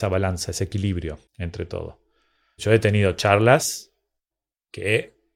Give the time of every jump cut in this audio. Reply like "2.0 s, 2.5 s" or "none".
1.3 s